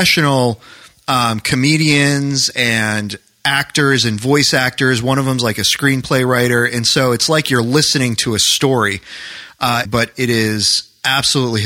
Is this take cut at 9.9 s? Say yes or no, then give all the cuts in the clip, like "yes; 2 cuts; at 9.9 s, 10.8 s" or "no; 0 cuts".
yes; 1 cut; at 9.9 s